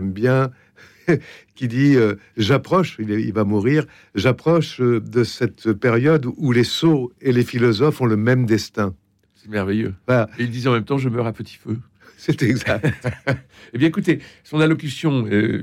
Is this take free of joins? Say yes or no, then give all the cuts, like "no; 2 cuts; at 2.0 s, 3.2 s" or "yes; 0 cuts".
yes; 0 cuts